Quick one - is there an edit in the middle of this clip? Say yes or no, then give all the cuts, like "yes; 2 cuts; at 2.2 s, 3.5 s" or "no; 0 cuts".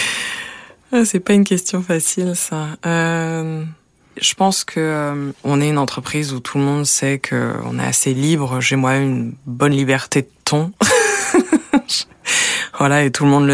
no; 0 cuts